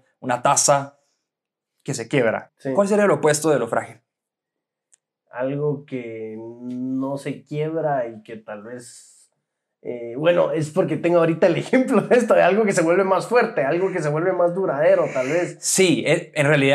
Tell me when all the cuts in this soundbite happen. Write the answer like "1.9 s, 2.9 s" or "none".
2.5 s